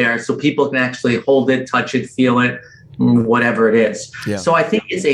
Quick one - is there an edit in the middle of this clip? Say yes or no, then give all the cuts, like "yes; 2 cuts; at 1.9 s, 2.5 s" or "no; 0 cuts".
no; 0 cuts